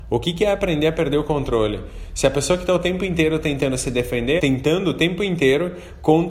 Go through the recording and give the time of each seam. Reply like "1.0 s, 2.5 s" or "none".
4.4 s